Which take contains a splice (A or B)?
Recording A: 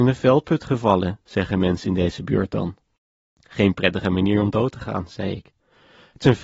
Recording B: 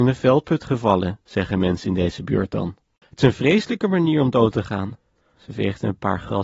B